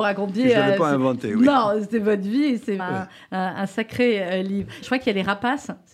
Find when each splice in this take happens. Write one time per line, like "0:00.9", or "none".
0:02.8
0:04.8